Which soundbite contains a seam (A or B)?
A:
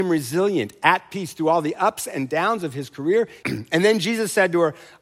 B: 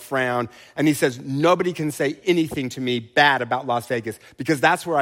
A